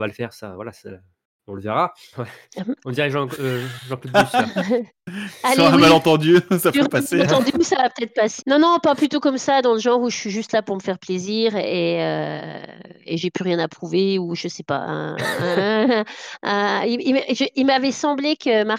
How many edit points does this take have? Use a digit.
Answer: 2